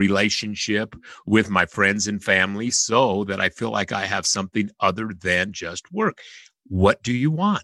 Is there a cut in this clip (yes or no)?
no